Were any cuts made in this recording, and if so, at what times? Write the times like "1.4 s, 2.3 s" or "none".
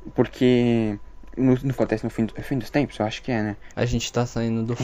1.7 s, 3.7 s